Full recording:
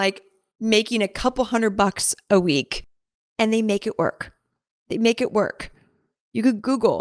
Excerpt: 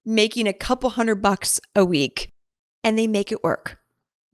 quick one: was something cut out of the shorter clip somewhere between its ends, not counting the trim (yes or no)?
no